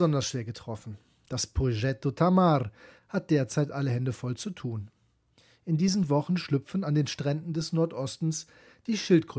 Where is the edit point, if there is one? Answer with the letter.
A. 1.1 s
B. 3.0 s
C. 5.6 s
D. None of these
B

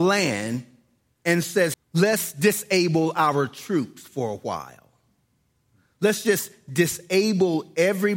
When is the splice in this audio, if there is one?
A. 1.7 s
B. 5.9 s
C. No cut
A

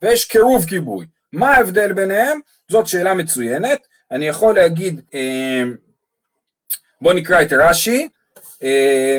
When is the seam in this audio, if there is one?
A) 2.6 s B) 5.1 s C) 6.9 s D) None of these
B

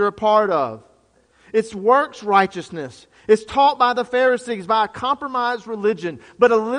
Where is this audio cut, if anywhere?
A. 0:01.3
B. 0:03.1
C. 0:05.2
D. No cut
D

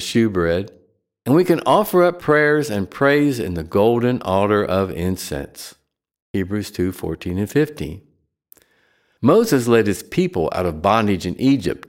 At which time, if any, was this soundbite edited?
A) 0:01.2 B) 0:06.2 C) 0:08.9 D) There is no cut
B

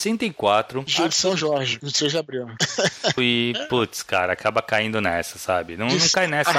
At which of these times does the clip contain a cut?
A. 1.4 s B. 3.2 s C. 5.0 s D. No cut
B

